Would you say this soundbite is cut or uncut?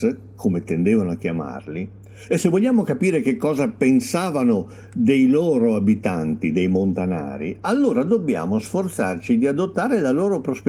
uncut